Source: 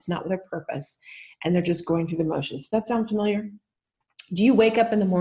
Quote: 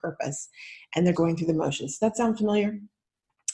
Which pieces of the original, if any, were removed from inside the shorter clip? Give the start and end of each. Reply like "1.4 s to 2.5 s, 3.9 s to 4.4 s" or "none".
1.6 s to 1.9 s